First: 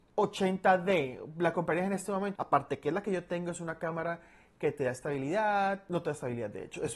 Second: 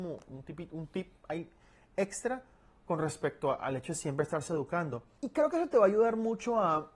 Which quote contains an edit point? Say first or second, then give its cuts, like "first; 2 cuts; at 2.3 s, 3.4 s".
first; 1 cut; at 2.4 s